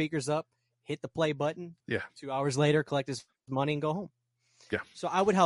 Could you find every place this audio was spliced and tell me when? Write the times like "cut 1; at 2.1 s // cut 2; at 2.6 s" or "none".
cut 1; at 1.8 s